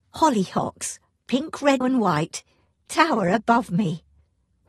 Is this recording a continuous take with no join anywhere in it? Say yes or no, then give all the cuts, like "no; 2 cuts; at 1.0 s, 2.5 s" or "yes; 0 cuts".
no; 1 cut; at 1.8 s